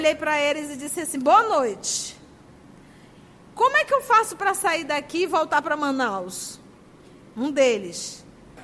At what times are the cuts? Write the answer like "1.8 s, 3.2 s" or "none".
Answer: 7.3 s